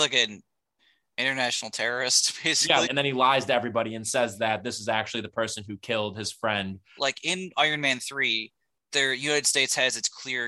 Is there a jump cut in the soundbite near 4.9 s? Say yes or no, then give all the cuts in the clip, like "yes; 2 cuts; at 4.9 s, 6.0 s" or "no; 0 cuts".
no; 2 cuts; at 2.8 s, 7.0 s